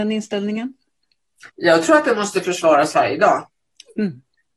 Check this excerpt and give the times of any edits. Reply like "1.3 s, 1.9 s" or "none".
1.5 s